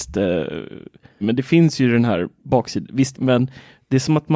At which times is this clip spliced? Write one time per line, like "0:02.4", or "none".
0:01.2
0:03.1